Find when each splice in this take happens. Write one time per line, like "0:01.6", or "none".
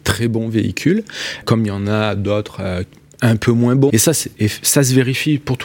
0:01.4
0:03.9